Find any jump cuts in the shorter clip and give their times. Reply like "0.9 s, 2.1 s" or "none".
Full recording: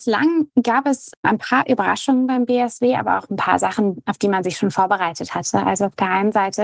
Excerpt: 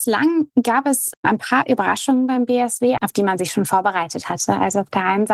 3.0 s